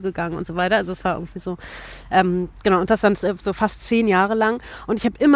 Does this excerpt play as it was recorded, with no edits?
yes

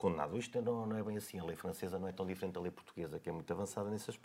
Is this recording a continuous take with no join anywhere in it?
yes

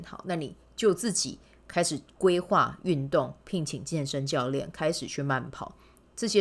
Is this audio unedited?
yes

